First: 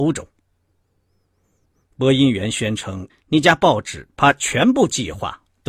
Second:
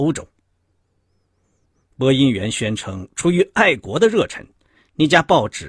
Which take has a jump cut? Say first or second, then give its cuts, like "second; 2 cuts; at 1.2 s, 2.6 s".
first; 1 cut; at 3.1 s